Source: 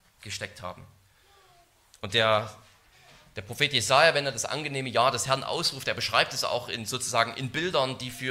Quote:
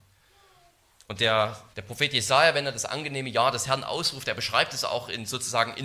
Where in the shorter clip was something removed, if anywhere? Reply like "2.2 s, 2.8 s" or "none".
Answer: 1.7 s